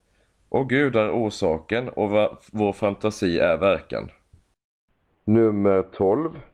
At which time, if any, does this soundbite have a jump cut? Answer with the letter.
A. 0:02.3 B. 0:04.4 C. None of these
C